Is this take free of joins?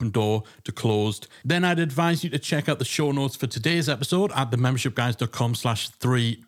no; 1 cut; at 1.4 s

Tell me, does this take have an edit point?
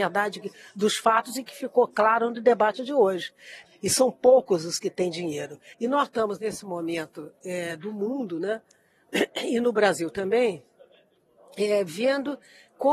yes; 2 cuts; at 3.7 s, 5.7 s

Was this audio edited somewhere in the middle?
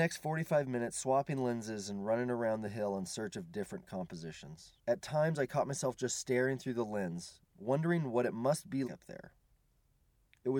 yes; 3 cuts; at 4.8 s, 7.4 s, 8.8 s

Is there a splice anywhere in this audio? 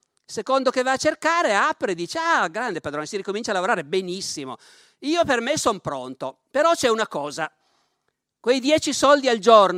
no; 0 cuts

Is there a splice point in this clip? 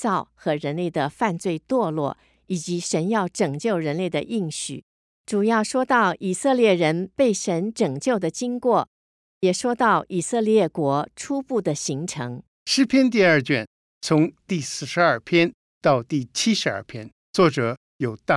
yes; 3 cuts; at 5.0 s, 12.5 s, 17.2 s

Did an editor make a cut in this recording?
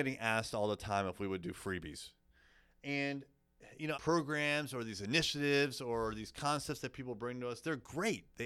yes; 1 cut; at 3.9 s

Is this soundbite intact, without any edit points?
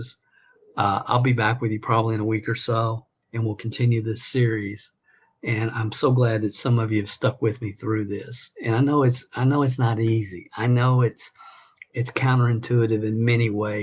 yes; 0 cuts

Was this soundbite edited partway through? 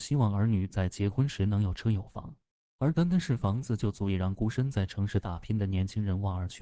no; 0 cuts

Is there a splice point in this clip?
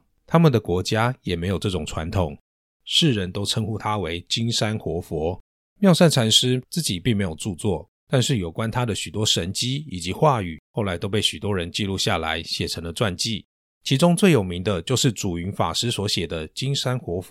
yes; 1 cut; at 2.8 s

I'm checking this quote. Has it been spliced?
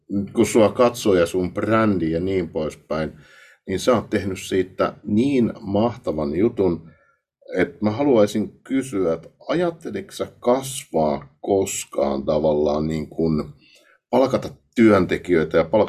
no; 0 cuts

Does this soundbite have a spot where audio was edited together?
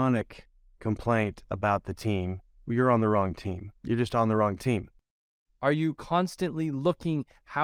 yes; 2 cuts; at 3.8 s, 5.5 s

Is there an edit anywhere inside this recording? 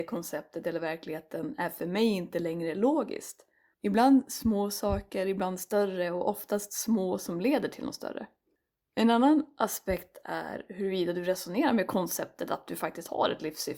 yes; 1 cut; at 3.7 s

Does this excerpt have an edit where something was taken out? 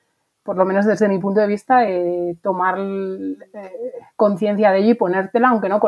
no; 0 cuts

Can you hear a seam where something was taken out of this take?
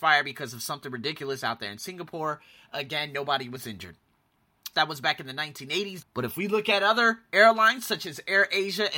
yes; 2 cuts; at 4.7 s, 6.0 s

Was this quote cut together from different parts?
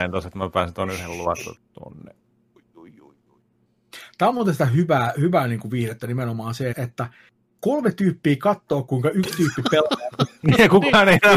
yes; 2 cuts; at 1.6 s, 6.7 s

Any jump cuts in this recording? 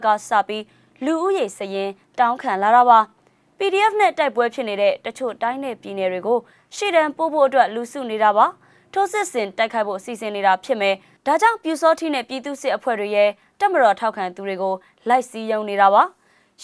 no; 0 cuts

